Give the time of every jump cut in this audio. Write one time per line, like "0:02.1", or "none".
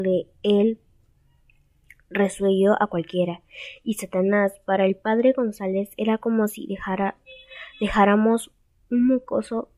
none